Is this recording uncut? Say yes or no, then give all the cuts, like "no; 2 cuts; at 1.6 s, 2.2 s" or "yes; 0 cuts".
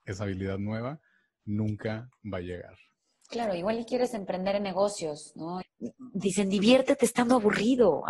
no; 1 cut; at 5.6 s